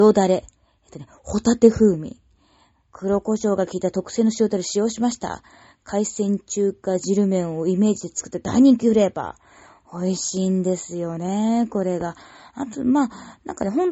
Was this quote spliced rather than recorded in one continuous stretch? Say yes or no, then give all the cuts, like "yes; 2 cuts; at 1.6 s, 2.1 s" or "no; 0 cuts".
no; 0 cuts